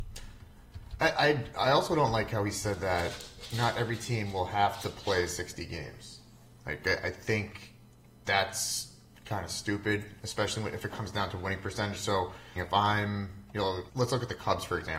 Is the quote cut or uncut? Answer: cut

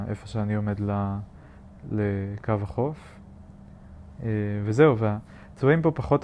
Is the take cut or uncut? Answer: uncut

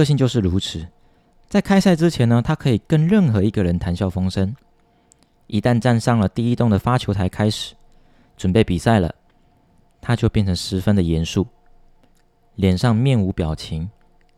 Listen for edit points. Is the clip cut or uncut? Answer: uncut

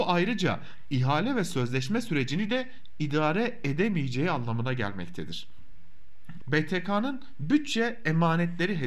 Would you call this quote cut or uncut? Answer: cut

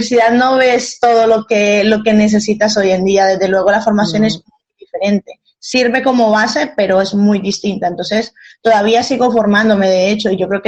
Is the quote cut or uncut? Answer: uncut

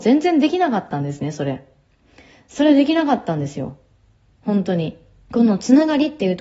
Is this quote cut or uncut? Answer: cut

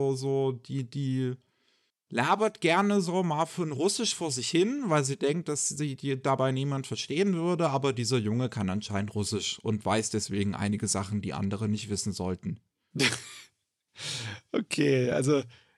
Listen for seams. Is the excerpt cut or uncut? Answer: uncut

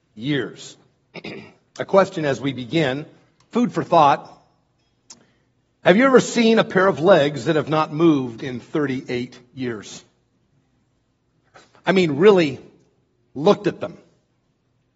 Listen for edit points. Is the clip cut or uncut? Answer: uncut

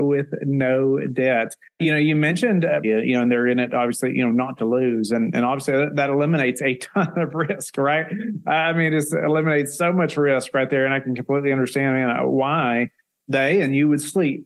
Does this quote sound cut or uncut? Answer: cut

